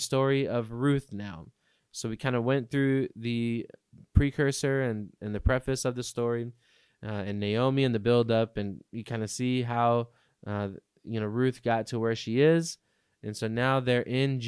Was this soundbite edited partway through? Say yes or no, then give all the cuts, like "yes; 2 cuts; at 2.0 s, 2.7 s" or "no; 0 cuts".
no; 0 cuts